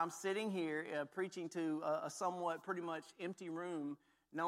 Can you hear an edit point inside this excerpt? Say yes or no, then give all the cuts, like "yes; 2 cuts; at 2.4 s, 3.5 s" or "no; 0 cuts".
no; 0 cuts